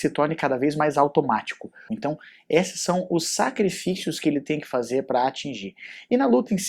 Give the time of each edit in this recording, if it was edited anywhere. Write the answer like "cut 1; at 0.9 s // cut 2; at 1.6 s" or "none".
cut 1; at 1.9 s